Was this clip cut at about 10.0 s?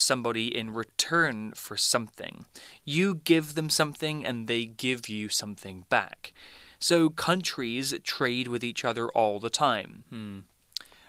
yes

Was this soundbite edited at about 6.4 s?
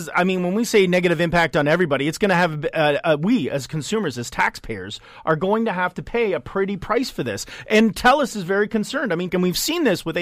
no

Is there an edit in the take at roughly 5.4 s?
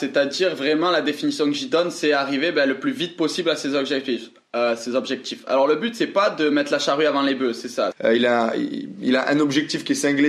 no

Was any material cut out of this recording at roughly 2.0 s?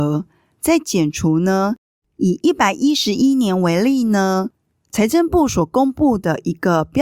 yes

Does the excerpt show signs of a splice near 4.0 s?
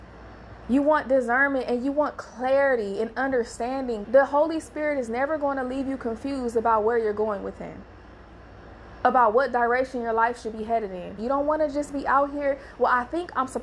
yes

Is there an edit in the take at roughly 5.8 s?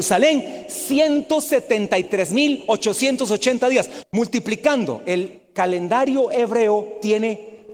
no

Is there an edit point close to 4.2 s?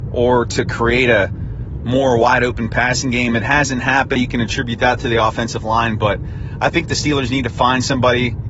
yes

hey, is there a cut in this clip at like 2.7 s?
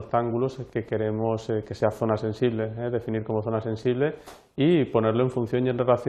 no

